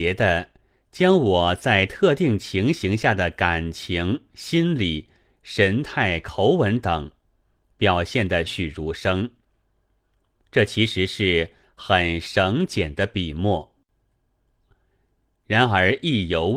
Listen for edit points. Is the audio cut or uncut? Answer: cut